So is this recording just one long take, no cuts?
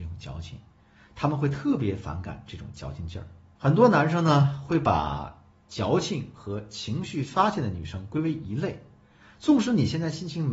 no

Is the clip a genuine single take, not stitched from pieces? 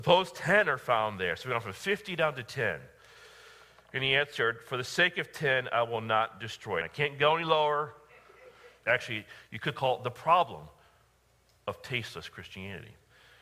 no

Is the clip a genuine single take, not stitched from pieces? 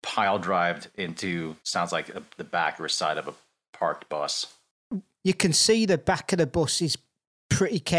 no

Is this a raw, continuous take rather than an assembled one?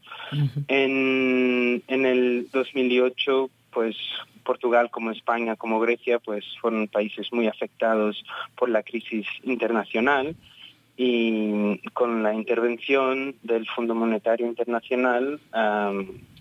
yes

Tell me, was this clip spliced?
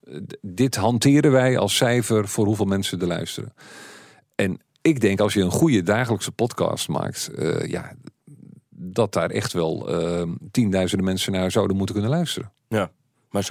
no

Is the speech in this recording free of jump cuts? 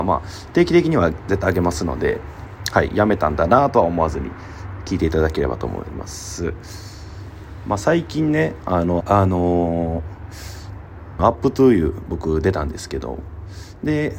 no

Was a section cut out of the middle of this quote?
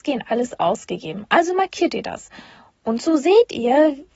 no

